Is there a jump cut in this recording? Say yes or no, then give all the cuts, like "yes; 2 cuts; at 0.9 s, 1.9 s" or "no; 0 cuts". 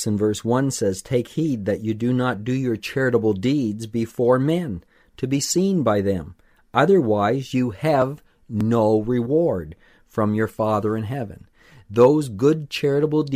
no; 0 cuts